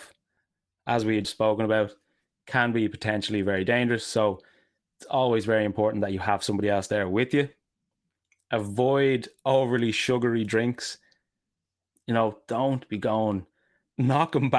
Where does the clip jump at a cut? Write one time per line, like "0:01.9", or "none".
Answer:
0:01.2

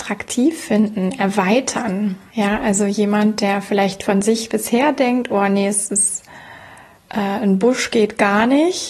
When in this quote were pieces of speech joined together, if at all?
none

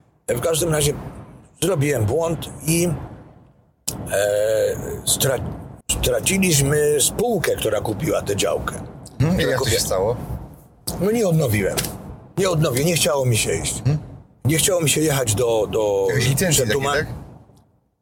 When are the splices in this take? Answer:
0:05.8

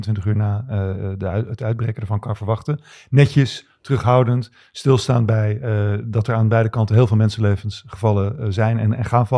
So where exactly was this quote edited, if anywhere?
none

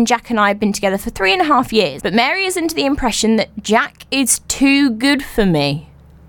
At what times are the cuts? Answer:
0:02.0

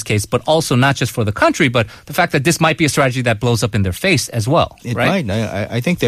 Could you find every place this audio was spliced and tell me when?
0:04.8

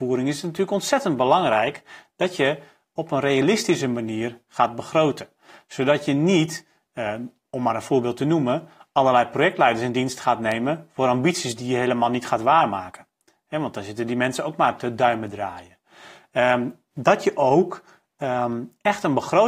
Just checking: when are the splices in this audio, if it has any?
none

